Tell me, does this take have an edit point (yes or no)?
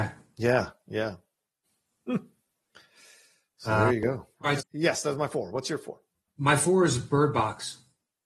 yes